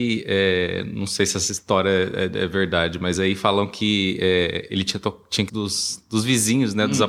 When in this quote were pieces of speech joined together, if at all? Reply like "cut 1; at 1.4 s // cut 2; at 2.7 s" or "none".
cut 1; at 5.5 s